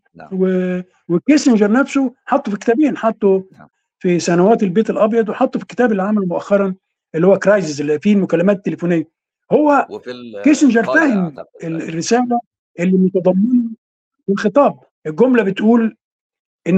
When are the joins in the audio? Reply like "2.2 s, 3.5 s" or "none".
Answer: none